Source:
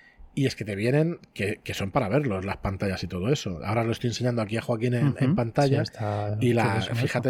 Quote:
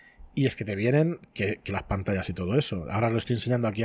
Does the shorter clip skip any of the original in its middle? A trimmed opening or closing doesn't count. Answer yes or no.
yes